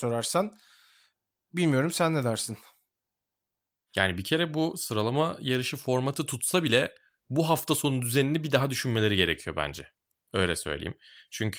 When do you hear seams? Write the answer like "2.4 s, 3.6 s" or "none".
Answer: none